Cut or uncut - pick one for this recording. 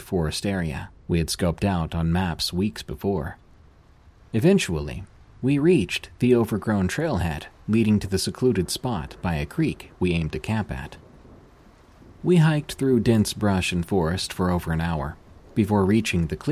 cut